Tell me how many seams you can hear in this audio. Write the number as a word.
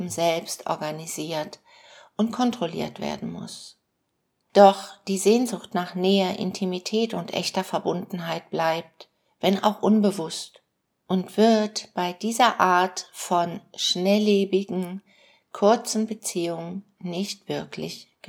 one